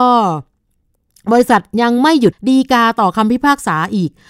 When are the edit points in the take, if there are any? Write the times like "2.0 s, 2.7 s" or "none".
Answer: 2.3 s